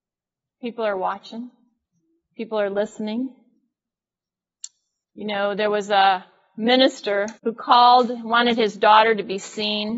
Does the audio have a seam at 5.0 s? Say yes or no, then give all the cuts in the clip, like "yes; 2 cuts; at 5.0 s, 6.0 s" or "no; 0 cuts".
yes; 2 cuts; at 5.0 s, 7.4 s